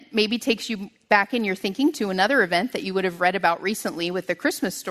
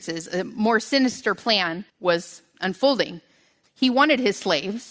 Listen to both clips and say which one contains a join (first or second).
second